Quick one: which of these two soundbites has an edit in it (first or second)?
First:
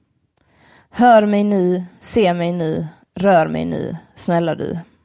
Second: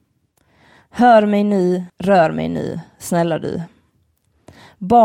second